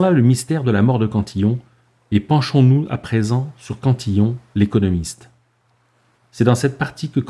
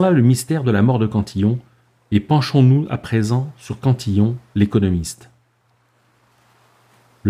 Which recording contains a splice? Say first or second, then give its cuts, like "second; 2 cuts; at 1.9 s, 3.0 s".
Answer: first; 1 cut; at 6.1 s